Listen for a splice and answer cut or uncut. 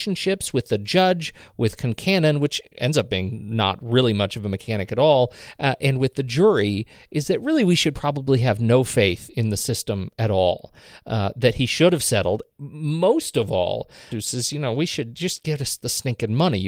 cut